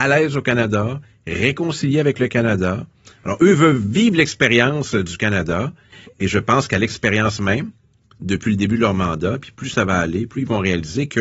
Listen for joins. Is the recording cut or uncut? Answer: uncut